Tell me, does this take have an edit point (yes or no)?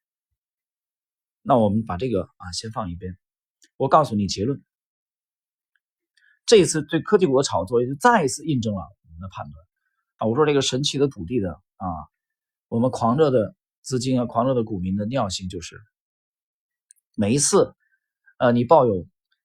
yes